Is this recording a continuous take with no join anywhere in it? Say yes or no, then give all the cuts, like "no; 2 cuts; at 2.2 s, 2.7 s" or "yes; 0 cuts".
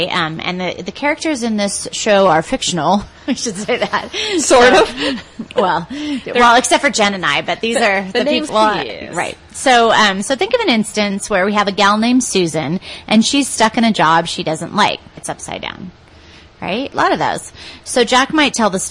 no; 3 cuts; at 8.5 s, 15.2 s, 16.9 s